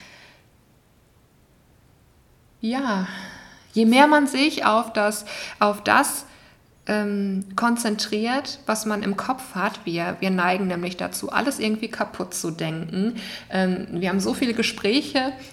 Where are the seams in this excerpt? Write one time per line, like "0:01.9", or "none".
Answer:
none